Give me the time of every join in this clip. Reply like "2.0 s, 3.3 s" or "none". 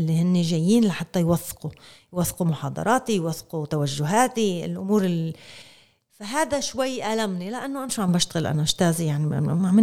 none

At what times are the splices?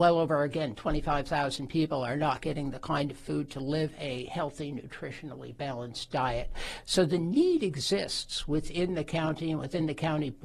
none

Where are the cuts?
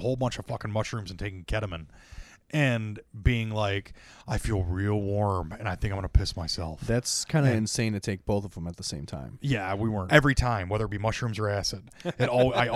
10.1 s

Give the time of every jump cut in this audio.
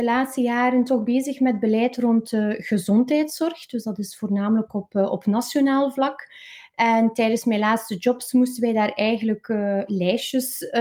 9.9 s

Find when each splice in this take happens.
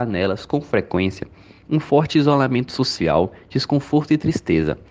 none

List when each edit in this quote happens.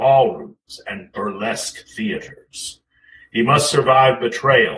none

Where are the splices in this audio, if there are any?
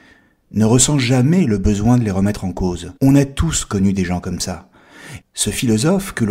3.0 s, 5.2 s

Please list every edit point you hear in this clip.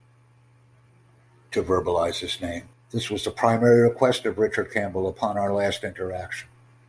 2.7 s

